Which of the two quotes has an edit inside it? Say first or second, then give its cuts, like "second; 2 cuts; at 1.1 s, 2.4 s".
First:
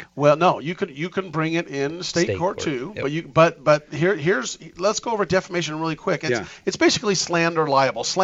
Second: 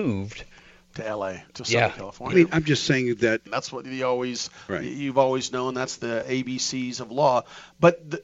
second; 2 cuts; at 2.3 s, 3.5 s